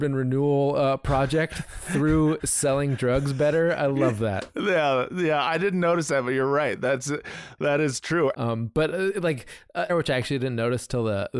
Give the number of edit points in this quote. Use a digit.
2